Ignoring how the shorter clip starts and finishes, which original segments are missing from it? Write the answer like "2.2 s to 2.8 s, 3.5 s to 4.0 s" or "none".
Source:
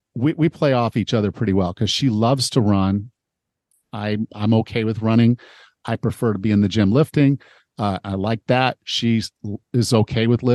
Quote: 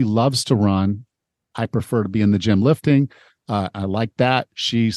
3.6 s to 5.8 s